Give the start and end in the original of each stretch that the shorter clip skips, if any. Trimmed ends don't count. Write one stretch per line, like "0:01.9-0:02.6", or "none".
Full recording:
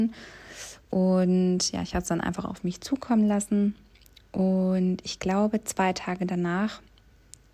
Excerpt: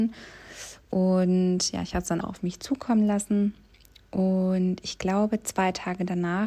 0:02.2-0:02.4